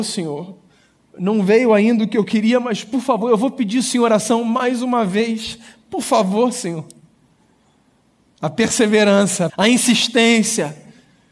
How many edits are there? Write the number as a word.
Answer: one